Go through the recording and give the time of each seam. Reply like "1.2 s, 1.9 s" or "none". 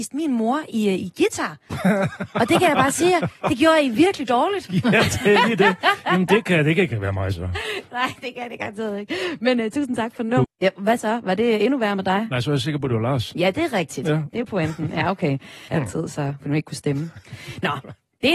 10.4 s, 15.7 s